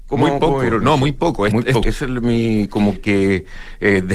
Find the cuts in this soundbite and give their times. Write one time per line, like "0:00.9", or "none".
0:01.8
0:03.0

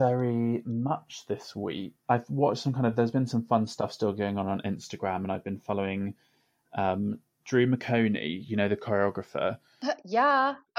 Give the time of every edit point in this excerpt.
none

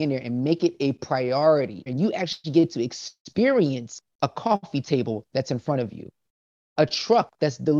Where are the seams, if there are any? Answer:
0:01.9
0:04.1

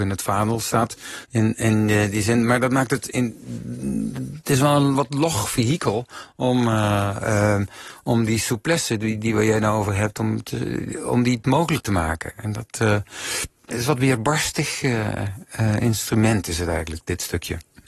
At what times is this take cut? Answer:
0:01.2
0:13.7

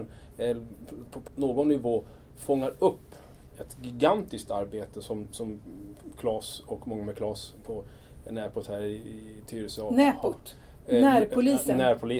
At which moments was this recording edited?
0:01.3

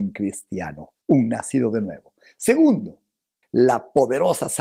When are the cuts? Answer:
0:01.0
0:03.4

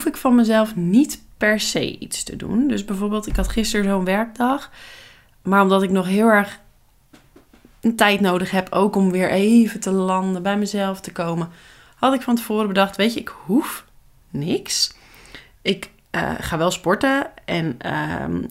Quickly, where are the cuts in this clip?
none

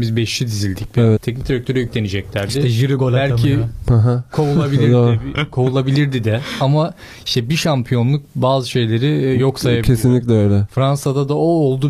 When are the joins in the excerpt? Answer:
0:01.2

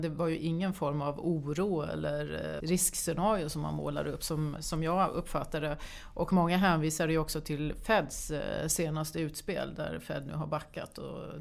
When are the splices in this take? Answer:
0:02.6
0:04.6

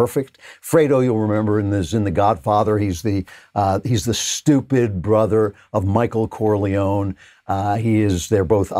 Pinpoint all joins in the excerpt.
none

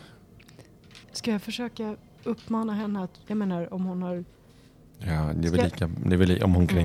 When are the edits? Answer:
0:01.0
0:03.2

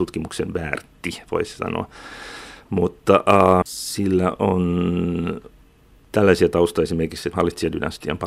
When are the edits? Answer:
0:03.6
0:07.3

